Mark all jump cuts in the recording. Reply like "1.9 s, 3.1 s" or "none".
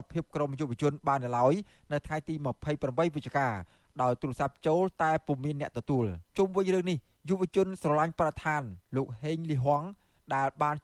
6.3 s